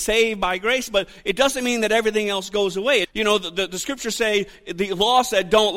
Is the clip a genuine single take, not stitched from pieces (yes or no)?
no